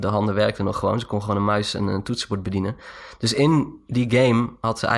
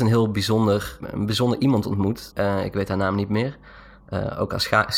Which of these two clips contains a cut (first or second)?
second